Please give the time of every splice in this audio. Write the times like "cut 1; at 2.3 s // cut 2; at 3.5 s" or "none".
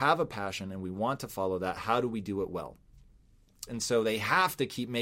cut 1; at 3.7 s